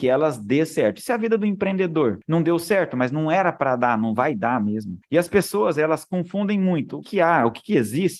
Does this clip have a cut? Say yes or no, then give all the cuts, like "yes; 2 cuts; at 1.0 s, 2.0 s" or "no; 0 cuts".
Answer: yes; 2 cuts; at 5.0 s, 7.0 s